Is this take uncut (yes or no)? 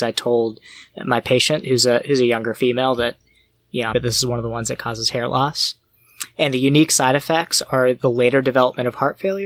no